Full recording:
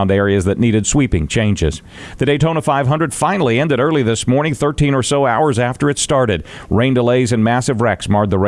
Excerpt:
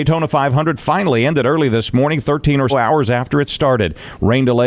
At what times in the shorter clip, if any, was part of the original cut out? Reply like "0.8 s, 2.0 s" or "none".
2.7 s

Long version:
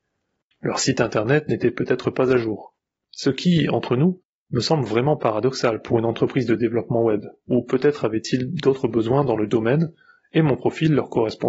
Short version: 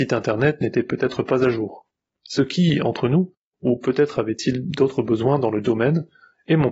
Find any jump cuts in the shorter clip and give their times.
3.5 s

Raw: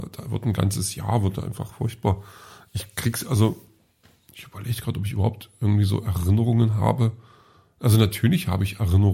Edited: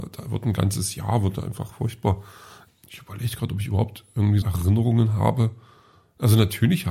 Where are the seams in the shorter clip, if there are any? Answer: 2.7 s, 4.4 s

